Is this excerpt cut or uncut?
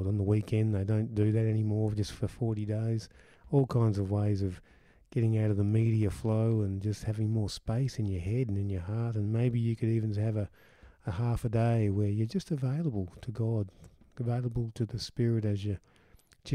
uncut